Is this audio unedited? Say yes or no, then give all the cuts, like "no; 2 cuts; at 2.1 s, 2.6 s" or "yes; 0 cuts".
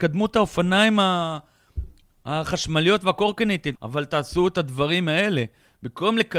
no; 1 cut; at 3.8 s